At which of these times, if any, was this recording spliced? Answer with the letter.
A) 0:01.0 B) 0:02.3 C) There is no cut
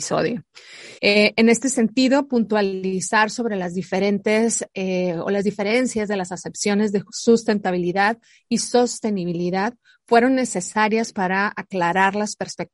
A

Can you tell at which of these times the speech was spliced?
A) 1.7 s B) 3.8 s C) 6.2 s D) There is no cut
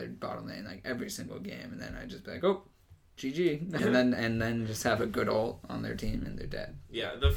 B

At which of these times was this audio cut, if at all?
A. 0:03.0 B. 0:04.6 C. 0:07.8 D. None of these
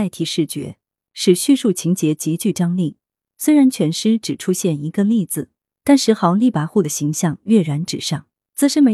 D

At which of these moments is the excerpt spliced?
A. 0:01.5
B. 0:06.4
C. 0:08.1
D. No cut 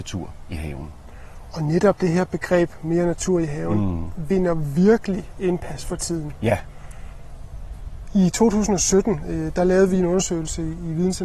D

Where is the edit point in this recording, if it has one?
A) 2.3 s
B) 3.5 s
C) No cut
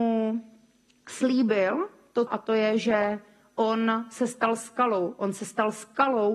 A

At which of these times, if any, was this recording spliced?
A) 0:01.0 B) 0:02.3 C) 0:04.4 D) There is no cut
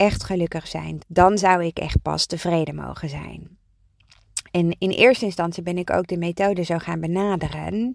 A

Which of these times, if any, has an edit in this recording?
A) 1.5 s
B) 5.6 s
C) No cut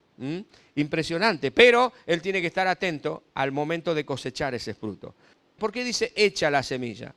B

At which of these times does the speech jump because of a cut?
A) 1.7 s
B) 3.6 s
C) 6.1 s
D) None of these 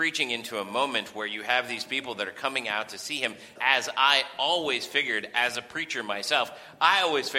B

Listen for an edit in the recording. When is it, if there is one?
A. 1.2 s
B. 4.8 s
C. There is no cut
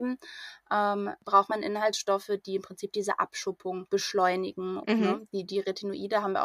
B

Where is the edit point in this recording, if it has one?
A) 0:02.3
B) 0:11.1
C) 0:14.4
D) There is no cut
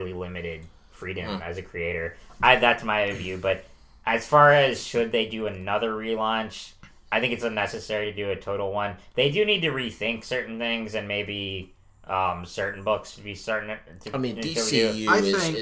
D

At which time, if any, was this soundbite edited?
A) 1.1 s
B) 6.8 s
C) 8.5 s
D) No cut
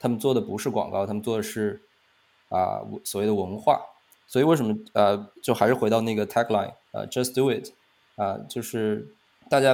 B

